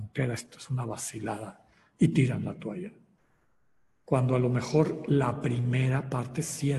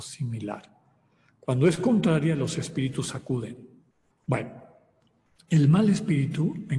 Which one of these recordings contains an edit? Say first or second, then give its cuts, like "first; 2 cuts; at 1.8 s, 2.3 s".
second; 1 cut; at 4.1 s